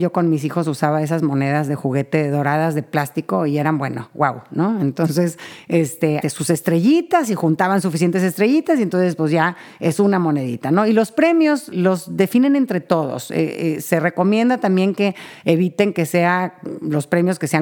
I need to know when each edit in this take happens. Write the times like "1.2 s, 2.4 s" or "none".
6.2 s, 11.7 s